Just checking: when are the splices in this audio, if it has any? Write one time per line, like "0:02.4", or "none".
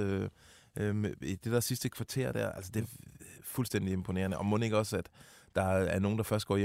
none